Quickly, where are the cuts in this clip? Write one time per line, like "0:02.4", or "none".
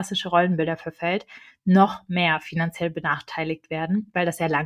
none